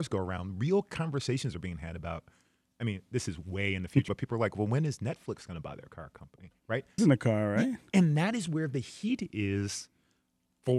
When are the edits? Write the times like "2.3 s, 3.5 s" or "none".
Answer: 4.1 s, 7.0 s